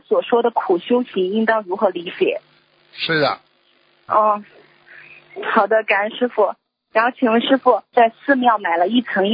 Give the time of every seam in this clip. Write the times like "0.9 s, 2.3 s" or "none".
2.8 s, 7.9 s